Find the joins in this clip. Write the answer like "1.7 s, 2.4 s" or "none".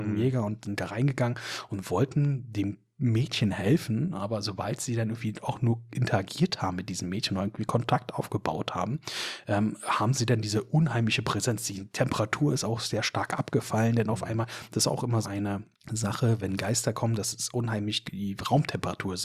15.2 s, 18.0 s